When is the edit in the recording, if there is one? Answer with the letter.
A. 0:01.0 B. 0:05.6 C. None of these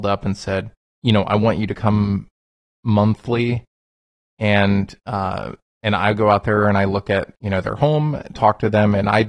A